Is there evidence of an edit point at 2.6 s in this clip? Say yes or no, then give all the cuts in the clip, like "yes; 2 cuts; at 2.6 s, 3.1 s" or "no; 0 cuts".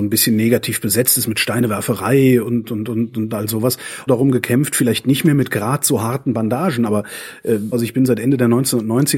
no; 2 cuts; at 4.1 s, 7.7 s